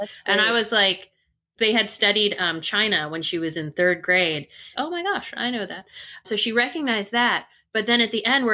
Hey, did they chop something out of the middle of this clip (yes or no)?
yes